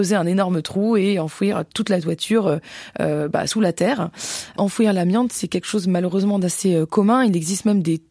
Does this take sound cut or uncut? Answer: uncut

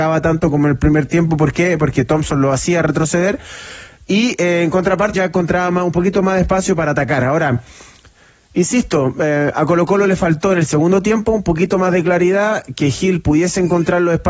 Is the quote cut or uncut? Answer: cut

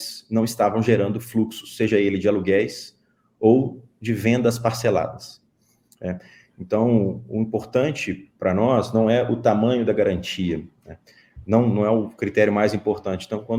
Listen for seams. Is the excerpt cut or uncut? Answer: uncut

